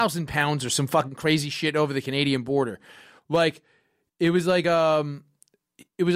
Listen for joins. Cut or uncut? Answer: uncut